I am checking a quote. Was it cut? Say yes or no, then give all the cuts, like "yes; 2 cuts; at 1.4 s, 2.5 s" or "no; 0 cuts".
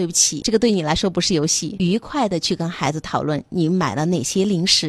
no; 0 cuts